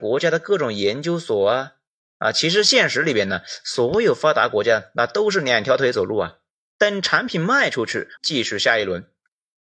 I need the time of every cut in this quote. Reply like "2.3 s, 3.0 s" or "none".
6.7 s, 8.2 s